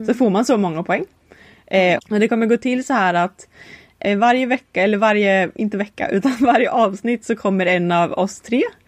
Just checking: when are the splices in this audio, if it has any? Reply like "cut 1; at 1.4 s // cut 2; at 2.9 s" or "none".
cut 1; at 2.0 s